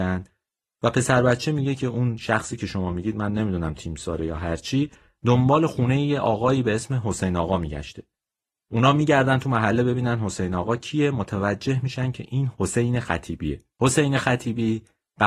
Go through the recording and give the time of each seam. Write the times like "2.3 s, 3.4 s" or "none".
12.5 s, 13.7 s